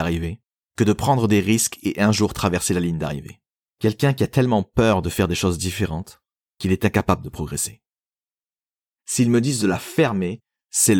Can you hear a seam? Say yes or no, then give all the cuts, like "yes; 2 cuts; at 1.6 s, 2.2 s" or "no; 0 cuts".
yes; 2 cuts; at 3.7 s, 9.0 s